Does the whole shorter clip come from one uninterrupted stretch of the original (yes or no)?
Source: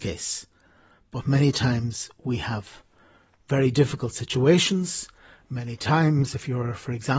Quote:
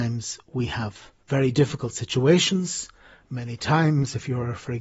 no